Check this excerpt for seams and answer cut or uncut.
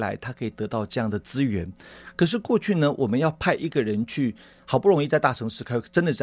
uncut